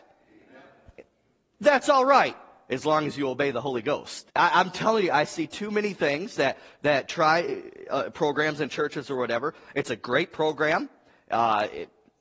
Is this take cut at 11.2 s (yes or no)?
no